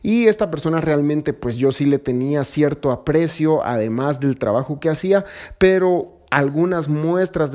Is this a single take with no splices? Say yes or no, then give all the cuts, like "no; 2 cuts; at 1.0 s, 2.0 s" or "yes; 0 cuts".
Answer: yes; 0 cuts